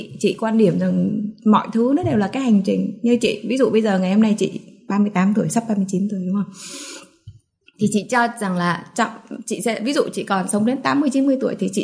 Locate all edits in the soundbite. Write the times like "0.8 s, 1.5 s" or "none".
none